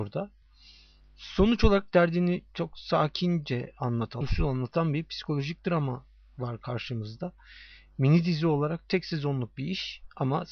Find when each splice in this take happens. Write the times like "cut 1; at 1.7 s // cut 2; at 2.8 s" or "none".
cut 1; at 1.0 s // cut 2; at 4.2 s